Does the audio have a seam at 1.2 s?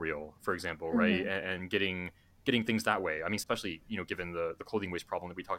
no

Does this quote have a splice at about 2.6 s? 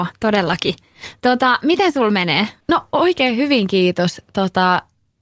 yes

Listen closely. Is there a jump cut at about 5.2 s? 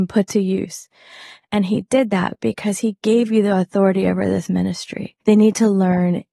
yes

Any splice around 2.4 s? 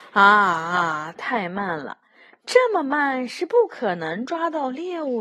no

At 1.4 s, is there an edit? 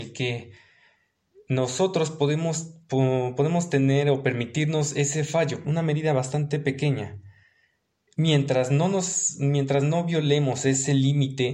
no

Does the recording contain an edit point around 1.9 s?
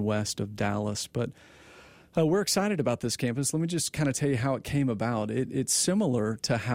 no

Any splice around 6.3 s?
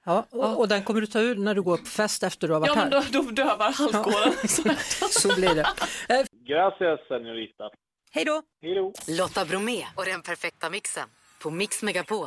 yes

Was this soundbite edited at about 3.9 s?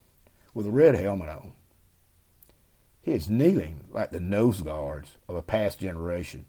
no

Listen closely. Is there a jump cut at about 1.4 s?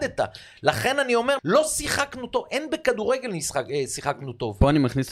yes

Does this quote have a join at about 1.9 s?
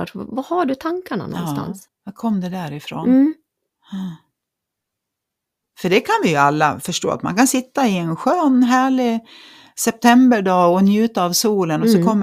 yes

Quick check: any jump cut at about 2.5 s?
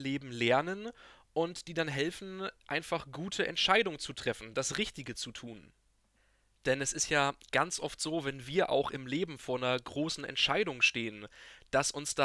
no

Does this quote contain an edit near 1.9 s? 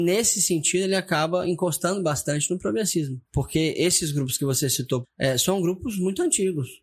no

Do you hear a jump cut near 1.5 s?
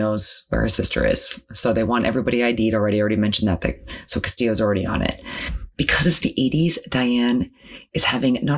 no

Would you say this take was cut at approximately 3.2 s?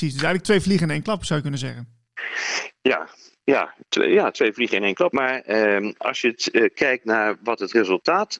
no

